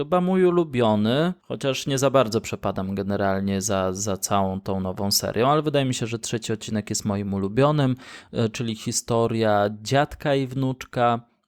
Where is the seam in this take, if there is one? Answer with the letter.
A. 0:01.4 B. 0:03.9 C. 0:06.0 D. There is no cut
A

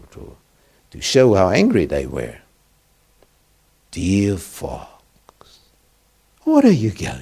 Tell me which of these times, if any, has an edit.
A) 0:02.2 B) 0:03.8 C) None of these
B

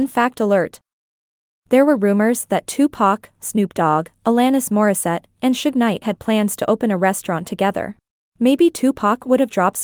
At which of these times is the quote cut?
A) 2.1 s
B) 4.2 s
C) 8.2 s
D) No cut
C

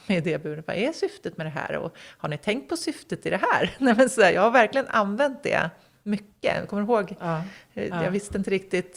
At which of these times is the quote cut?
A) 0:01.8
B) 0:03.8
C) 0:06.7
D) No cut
D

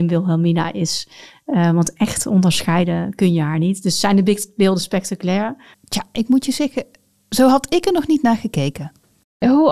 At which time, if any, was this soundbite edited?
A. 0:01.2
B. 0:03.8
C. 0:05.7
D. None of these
C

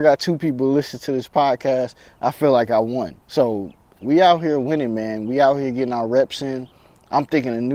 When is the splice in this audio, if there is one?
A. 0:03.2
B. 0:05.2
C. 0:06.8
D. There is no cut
A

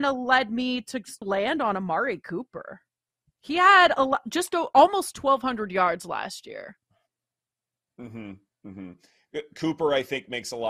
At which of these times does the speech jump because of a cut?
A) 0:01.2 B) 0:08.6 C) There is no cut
A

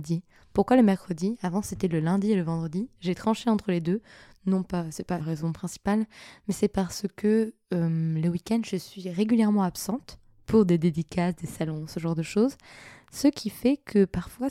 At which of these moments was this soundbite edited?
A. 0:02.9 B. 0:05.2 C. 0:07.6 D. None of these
B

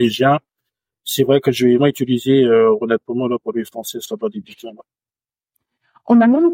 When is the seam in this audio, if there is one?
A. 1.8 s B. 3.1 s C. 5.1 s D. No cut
A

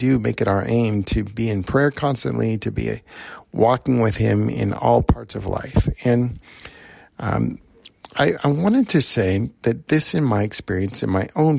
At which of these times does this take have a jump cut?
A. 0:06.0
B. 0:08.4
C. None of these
C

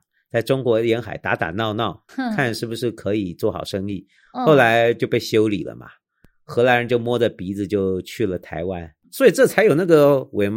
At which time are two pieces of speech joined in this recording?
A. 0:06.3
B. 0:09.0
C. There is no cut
B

